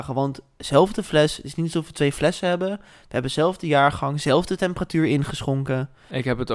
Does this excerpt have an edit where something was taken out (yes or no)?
no